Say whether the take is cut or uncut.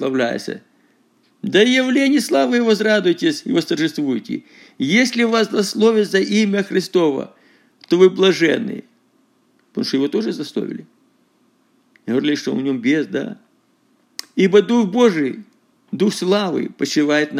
cut